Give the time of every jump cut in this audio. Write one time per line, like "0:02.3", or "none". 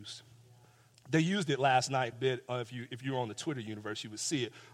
0:00.9
0:02.1